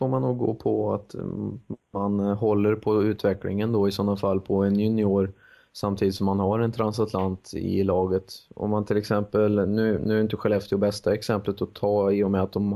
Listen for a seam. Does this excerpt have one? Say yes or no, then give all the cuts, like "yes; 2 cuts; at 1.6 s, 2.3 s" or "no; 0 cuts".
no; 0 cuts